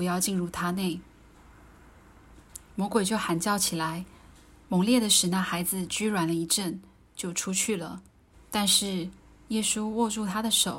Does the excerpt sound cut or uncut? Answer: cut